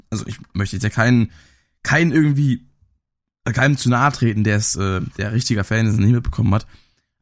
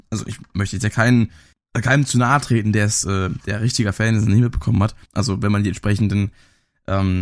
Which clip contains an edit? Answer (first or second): second